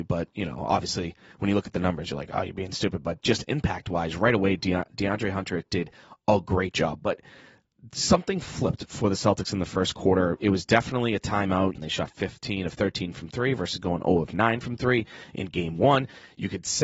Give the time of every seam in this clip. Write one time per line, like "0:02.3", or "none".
0:11.7

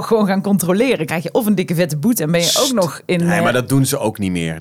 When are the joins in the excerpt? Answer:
none

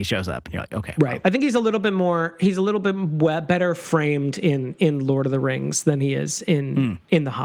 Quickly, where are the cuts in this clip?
none

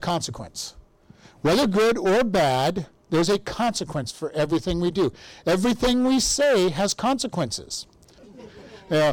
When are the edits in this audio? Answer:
0:08.2

